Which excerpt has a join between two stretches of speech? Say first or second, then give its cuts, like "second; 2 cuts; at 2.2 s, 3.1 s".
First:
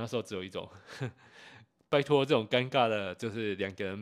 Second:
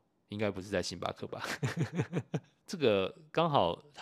second; 1 cut; at 2.6 s